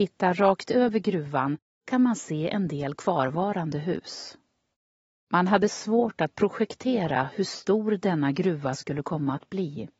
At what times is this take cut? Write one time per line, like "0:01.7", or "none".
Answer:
0:05.3